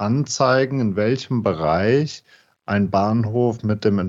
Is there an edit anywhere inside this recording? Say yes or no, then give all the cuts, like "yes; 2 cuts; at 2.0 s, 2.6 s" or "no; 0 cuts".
no; 0 cuts